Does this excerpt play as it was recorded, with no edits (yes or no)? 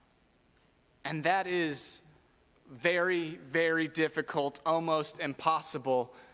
yes